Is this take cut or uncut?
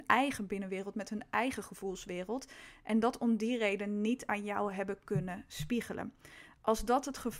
uncut